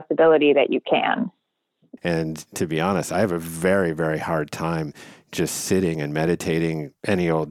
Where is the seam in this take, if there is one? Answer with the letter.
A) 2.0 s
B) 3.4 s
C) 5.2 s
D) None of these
A